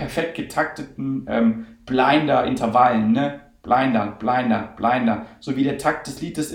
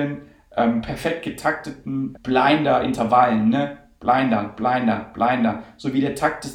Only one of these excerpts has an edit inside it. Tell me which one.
second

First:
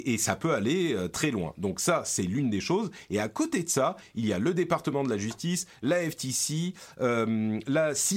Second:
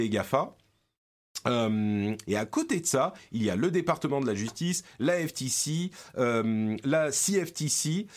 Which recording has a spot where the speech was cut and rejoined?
second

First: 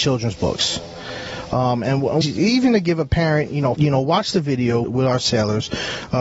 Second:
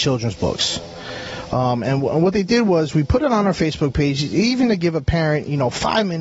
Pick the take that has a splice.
first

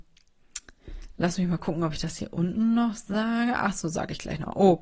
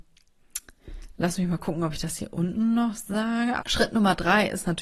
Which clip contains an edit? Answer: second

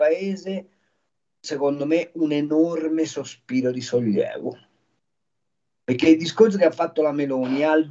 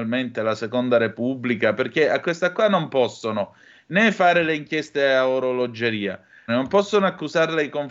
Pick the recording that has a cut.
second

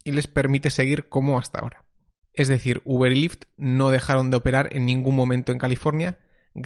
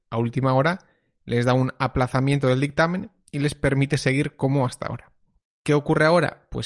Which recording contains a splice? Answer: second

